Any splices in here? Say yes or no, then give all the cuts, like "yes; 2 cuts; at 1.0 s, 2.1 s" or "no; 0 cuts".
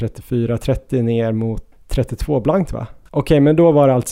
yes; 2 cuts; at 1.7 s, 3.1 s